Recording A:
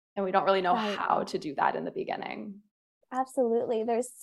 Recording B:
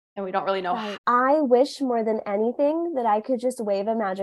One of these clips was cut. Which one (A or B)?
B